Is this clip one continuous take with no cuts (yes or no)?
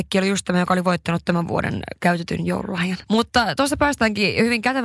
no